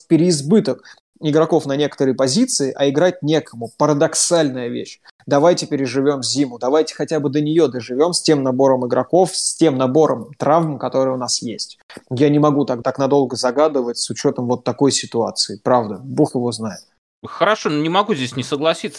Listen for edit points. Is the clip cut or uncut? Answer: cut